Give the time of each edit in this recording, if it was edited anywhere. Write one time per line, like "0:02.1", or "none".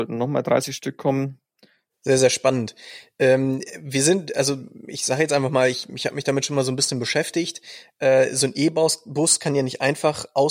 0:01.9

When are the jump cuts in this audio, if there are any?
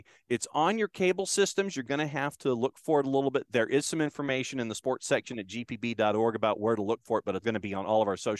0:07.4

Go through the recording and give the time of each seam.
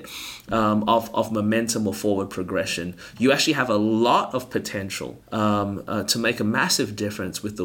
0:05.2

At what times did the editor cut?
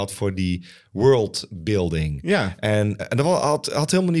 0:03.0

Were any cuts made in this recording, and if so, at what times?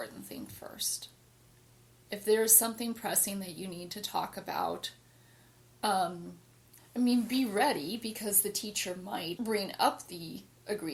0:06.8
0:09.4

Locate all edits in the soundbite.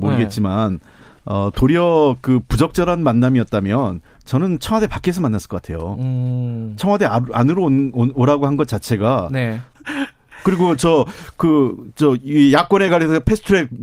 0:09.7

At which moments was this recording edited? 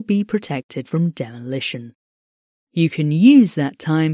none

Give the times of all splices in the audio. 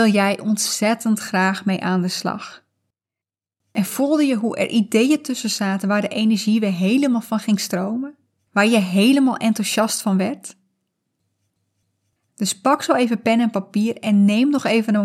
0:08.4
0:12.2

